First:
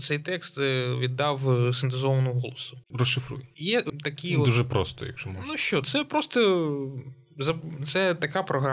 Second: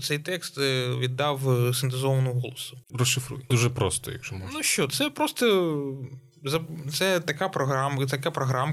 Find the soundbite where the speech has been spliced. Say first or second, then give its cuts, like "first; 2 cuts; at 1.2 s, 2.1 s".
second; 1 cut; at 3.5 s